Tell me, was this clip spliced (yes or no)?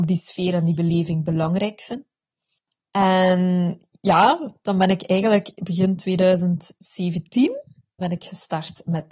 yes